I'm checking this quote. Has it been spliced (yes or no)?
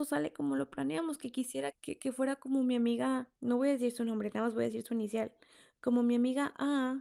yes